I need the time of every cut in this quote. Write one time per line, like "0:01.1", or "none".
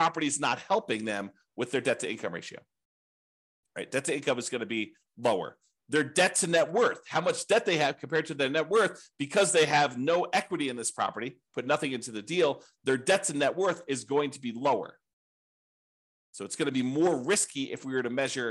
none